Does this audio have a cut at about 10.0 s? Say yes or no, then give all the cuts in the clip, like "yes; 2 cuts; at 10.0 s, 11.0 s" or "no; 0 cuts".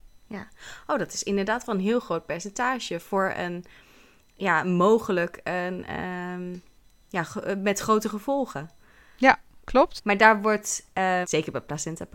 yes; 2 cuts; at 10.0 s, 11.2 s